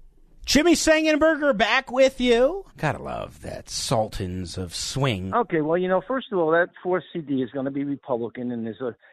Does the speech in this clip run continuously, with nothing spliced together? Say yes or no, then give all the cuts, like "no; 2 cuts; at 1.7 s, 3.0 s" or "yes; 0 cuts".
no; 2 cuts; at 2.7 s, 5.3 s